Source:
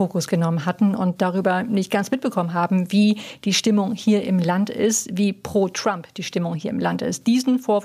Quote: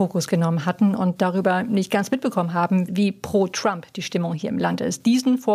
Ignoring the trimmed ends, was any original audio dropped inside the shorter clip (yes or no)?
yes